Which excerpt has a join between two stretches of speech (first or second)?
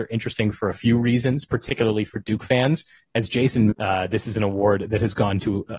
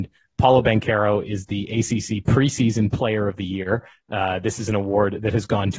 first